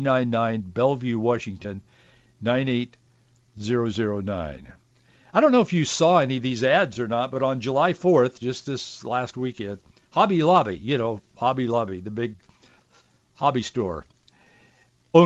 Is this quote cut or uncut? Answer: uncut